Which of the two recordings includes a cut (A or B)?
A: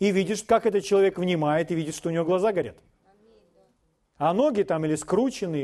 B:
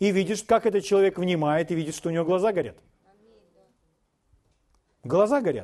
A